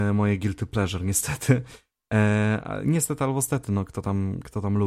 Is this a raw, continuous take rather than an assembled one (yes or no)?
yes